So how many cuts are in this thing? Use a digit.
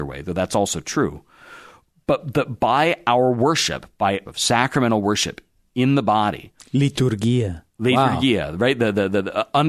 1